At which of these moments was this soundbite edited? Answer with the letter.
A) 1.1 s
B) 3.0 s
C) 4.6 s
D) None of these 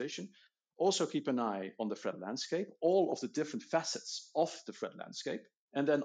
D